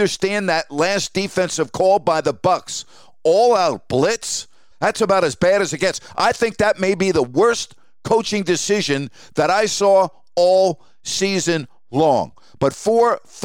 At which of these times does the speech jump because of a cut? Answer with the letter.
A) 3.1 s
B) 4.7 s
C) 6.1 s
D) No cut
B